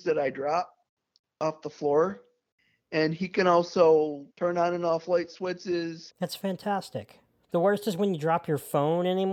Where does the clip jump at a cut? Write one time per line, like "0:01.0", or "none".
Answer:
0:04.3
0:06.1
0:07.4